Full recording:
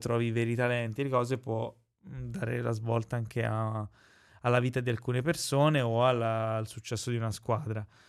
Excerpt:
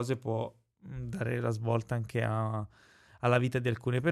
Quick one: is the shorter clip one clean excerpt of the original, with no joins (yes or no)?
yes